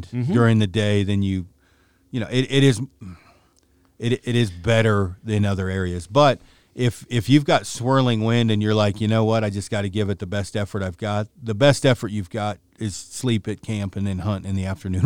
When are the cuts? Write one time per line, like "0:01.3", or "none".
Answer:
none